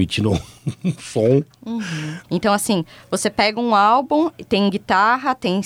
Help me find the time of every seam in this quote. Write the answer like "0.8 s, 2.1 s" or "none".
2.2 s